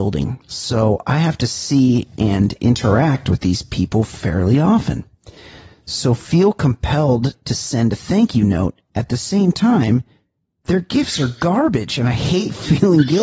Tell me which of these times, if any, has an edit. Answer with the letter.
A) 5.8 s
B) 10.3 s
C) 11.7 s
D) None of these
D